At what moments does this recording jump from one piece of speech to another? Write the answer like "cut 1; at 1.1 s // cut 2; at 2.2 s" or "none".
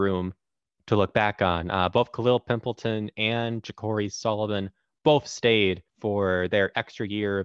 cut 1; at 5.9 s